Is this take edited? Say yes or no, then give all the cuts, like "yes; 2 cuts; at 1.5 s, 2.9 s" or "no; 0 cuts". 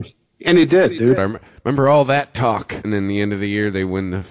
yes; 1 cut; at 1.2 s